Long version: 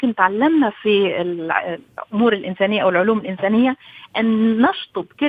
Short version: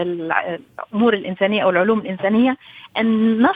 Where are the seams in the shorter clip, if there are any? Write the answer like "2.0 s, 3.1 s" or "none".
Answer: none